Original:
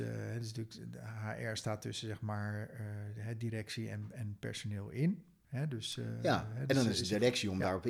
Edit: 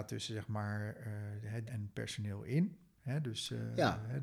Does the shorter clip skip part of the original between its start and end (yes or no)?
yes